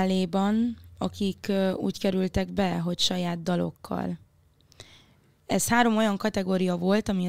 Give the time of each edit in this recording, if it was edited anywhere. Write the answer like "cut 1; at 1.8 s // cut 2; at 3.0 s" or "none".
none